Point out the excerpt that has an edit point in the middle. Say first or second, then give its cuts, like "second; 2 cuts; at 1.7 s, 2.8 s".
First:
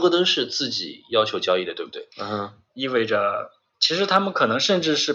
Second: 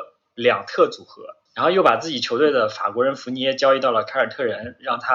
first; 2 cuts; at 2.1 s, 3.7 s